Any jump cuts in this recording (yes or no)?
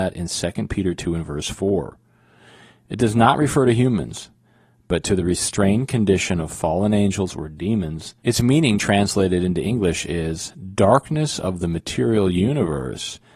yes